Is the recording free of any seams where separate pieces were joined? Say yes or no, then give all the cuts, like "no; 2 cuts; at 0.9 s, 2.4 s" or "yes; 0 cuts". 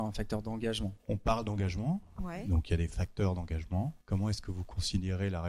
no; 2 cuts; at 1.0 s, 4.0 s